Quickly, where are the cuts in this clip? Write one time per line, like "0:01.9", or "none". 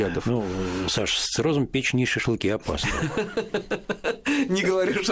none